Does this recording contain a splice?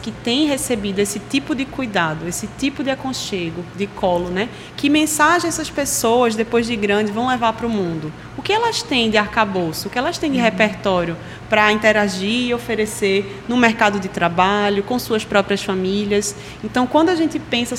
no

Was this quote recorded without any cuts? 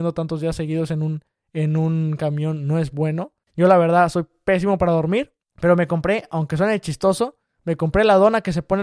no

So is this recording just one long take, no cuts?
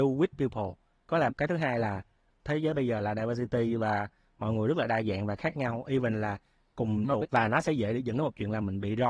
no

